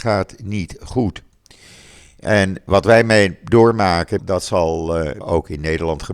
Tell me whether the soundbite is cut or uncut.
cut